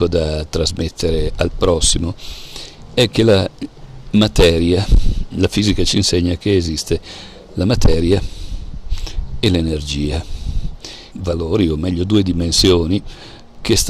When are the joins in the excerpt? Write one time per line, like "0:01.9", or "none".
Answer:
0:11.1